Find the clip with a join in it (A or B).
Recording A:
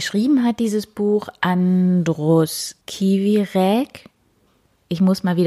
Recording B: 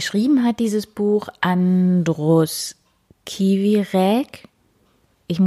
A